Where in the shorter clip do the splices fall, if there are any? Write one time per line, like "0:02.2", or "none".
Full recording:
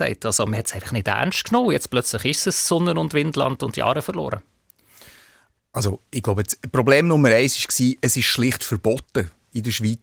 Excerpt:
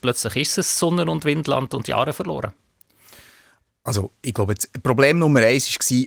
none